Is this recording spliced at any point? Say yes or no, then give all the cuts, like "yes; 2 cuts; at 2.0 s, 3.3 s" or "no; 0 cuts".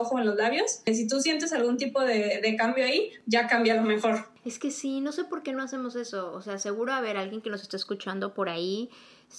no; 0 cuts